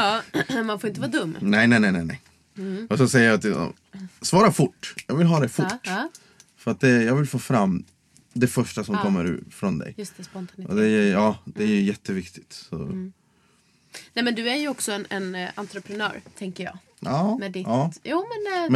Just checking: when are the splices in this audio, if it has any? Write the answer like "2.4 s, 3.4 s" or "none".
none

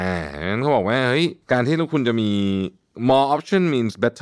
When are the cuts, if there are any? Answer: 1.4 s

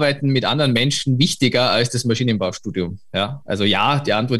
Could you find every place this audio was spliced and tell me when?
none

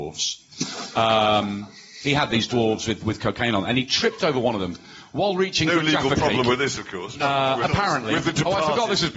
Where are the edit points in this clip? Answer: none

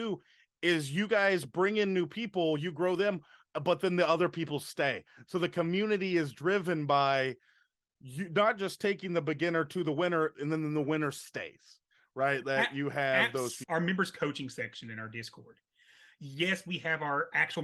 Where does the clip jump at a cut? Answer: 13.6 s

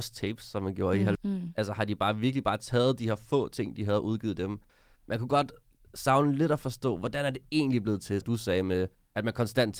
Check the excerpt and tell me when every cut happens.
1.2 s, 8.2 s

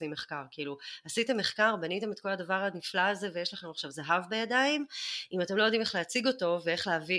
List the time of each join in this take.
none

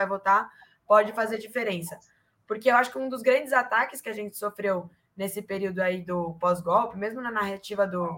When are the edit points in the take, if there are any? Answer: none

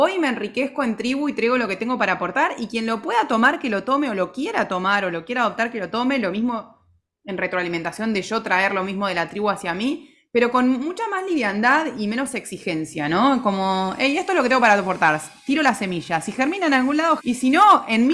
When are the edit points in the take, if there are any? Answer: 17.2 s

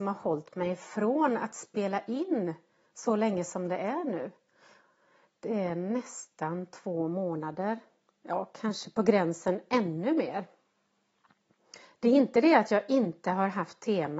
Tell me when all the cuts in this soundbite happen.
none

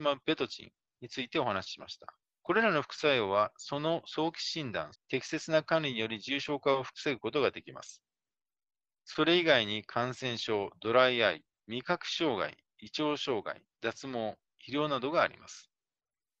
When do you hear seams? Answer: 2.4 s, 4.9 s

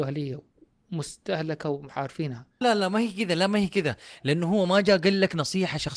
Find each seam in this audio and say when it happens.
2.6 s

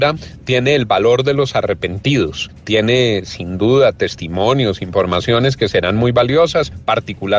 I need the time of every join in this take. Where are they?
none

